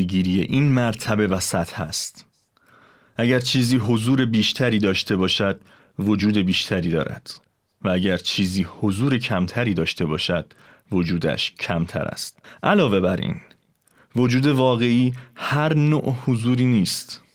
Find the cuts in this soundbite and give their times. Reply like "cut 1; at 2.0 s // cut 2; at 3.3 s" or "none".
none

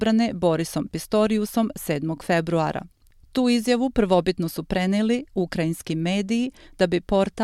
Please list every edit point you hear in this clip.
none

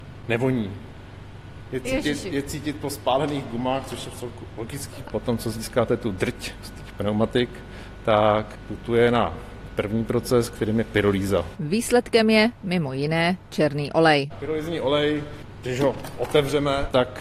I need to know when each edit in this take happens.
cut 1; at 5.1 s

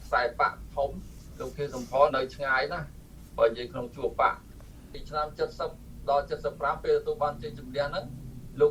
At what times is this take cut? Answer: cut 1; at 2.1 s

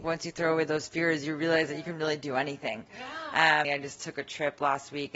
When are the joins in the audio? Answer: cut 1; at 3.6 s

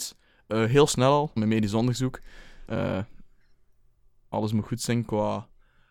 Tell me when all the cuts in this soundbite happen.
cut 1; at 1.4 s // cut 2; at 2.7 s

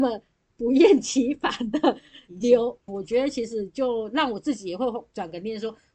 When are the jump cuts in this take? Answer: cut 1; at 2.9 s

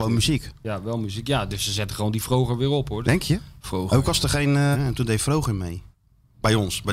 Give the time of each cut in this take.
cut 1; at 3.0 s // cut 2; at 4.7 s

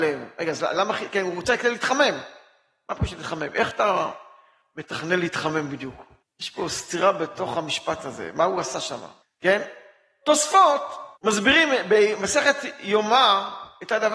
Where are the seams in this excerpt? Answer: cut 1; at 6.2 s // cut 2; at 9.2 s // cut 3; at 11.2 s

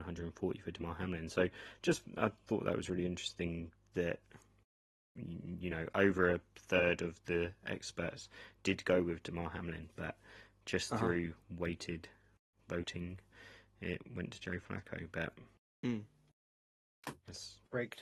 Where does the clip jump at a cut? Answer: none

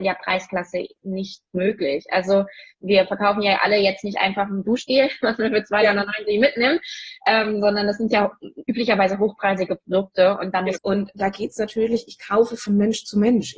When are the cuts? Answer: cut 1; at 10.8 s

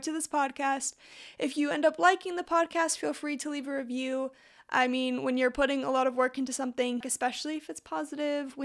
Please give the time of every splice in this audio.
cut 1; at 7.0 s

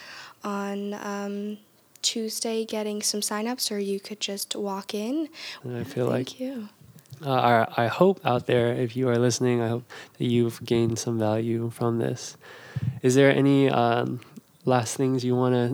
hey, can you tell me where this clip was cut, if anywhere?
cut 1; at 5.6 s

